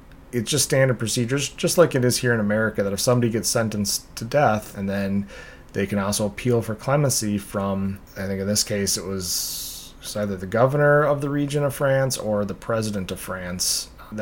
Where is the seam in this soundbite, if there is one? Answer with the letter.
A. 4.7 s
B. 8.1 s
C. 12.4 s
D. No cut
A